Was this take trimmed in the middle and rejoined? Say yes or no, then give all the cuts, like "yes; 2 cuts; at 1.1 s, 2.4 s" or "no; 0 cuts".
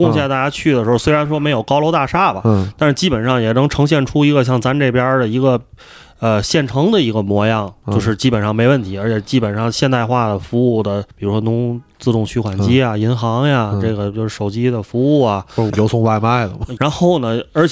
yes; 3 cuts; at 11.1 s, 15.7 s, 16.8 s